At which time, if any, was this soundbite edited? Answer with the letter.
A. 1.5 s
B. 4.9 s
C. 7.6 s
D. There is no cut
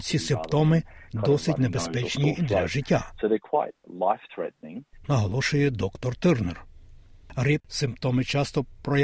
C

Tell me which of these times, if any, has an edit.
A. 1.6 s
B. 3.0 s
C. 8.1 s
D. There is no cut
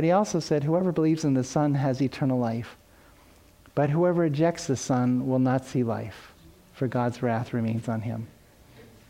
D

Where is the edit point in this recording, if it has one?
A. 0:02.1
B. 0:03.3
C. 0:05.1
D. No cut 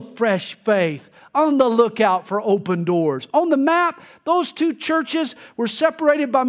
D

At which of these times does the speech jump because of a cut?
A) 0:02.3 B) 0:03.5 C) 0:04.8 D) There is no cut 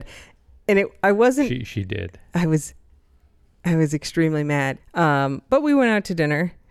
C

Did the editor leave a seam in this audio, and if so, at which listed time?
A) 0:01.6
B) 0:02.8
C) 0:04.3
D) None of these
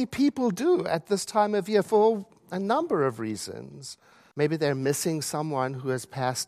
C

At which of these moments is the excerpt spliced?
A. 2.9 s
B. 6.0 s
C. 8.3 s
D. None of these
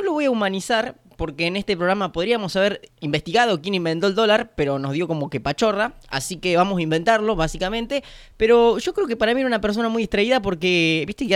A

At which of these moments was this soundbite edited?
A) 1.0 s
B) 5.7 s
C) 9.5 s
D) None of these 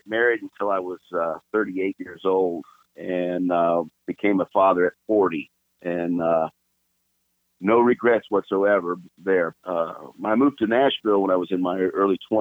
C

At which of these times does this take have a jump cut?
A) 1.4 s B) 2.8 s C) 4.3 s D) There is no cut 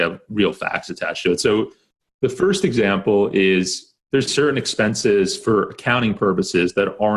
C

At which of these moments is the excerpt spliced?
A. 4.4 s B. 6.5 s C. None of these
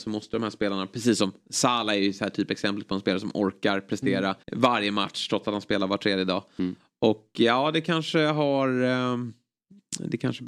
A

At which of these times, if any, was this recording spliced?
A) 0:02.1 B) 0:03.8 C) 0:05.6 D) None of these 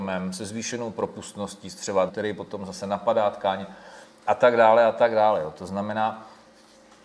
A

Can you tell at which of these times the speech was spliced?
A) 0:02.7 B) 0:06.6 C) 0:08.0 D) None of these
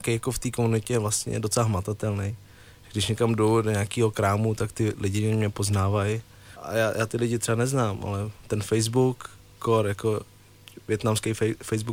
B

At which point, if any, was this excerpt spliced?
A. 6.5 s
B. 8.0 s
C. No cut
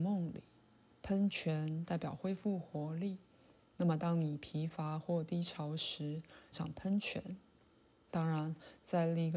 A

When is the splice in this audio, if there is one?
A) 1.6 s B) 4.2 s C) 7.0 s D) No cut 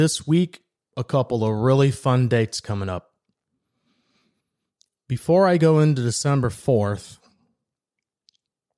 D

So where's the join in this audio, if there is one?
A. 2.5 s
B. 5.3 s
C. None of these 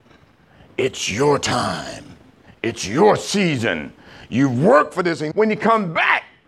B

